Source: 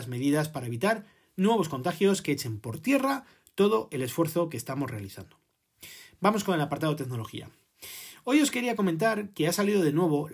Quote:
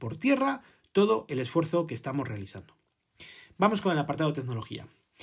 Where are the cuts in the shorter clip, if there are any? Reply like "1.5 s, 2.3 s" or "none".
none